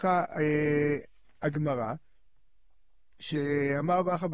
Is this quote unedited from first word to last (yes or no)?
yes